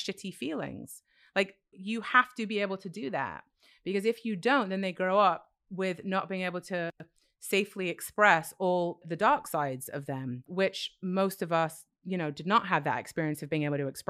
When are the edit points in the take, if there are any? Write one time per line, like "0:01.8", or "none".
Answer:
0:01.7
0:09.0